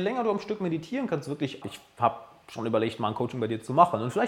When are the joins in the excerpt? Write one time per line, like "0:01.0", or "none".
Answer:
0:01.6